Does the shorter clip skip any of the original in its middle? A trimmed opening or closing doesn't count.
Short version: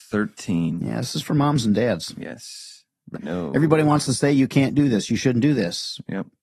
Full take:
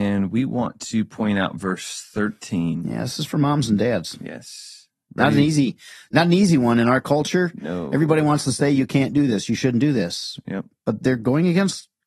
yes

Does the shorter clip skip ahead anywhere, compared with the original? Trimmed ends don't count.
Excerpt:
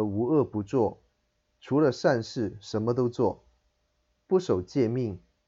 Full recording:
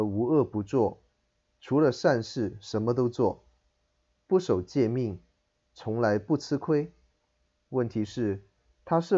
no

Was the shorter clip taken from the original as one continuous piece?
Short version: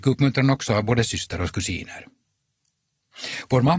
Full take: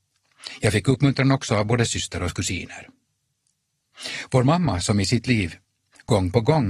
yes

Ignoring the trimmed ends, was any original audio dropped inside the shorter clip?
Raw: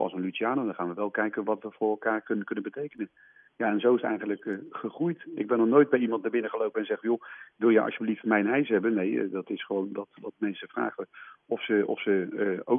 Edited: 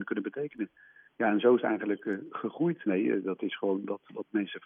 yes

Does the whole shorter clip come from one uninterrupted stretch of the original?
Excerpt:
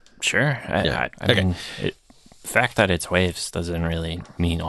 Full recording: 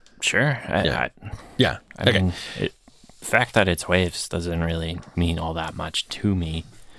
no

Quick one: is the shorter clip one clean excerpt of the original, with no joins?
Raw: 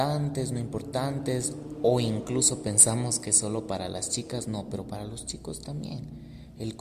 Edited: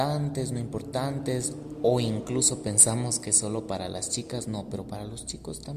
yes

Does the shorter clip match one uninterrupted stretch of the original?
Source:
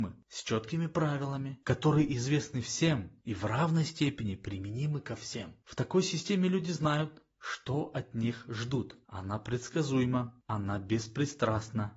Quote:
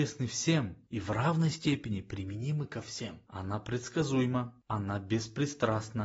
no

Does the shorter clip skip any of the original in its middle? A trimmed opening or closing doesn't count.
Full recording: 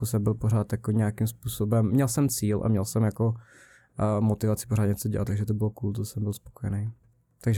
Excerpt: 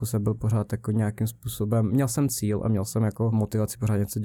yes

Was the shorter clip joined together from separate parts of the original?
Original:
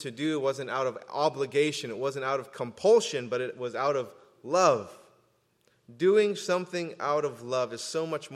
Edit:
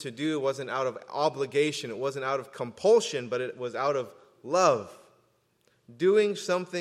no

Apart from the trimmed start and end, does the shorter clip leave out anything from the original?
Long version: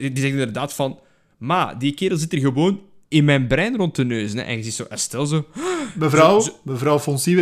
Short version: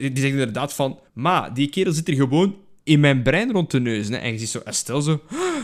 yes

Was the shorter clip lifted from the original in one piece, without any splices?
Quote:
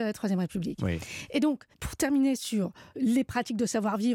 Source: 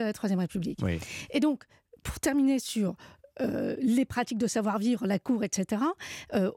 no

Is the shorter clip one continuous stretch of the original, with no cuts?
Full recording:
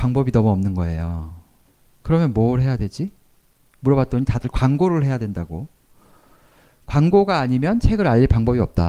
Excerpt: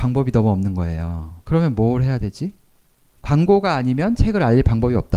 no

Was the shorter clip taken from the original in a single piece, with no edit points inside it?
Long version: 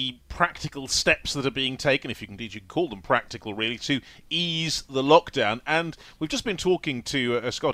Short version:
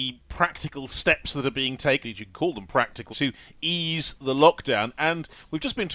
no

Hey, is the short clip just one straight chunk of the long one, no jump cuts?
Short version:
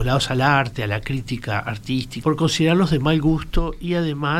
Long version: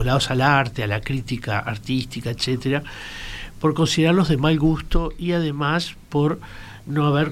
no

